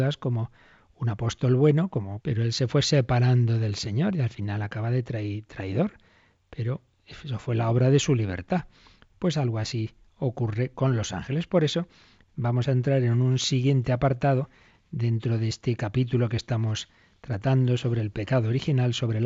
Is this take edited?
yes; 1 cut; at 2.2 s

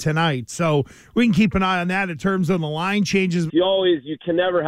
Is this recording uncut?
no; 1 cut; at 3.5 s

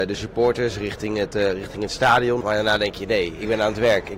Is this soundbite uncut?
no; 1 cut; at 2.4 s

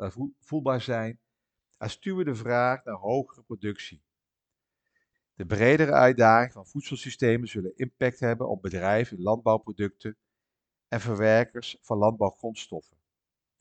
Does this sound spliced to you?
yes; 1 cut; at 5.1 s

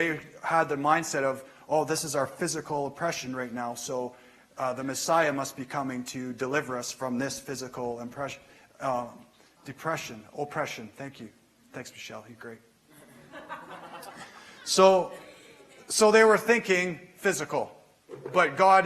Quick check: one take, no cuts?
yes; 0 cuts

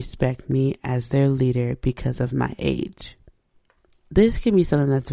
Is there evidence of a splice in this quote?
no; 0 cuts

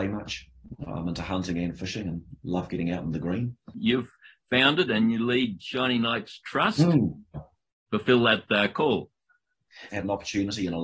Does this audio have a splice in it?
yes; 2 cuts; at 7.3 s, 9.9 s

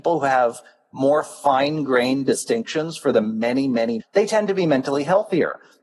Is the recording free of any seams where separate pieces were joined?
no; 1 cut; at 4.0 s

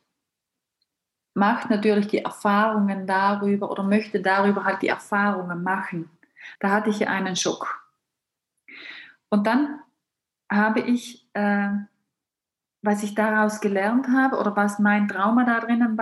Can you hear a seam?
yes; 1 cut; at 6.6 s

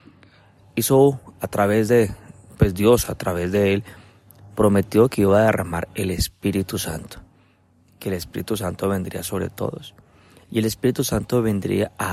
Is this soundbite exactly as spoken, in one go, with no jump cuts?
yes; 0 cuts

